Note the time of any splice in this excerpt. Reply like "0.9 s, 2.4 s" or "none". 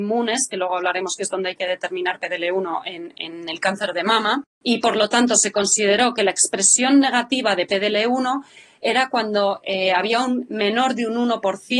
4.5 s